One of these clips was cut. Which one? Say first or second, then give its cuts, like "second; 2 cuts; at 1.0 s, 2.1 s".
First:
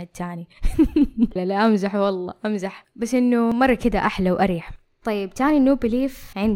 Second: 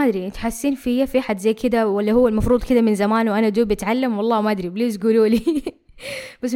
first; 1 cut; at 1.4 s